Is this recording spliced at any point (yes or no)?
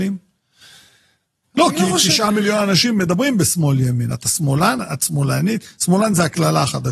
no